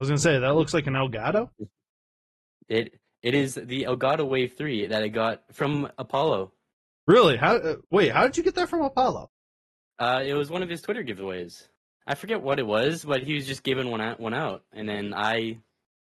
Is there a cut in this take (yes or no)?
no